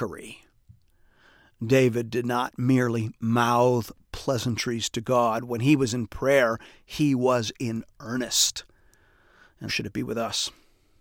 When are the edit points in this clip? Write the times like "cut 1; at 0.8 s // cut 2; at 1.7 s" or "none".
cut 1; at 9.7 s